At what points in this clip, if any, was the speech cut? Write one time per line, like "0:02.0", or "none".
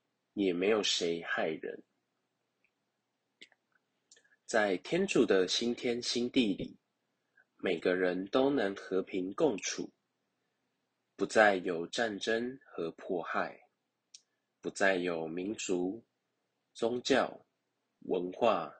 none

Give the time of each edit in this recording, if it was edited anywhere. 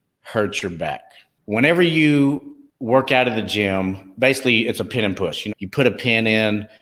0:05.5

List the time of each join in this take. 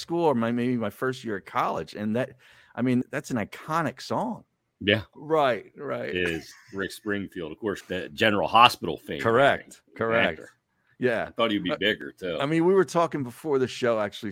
0:03.0
0:05.1
0:07.8

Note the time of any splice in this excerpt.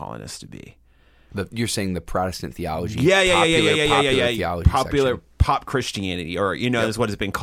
none

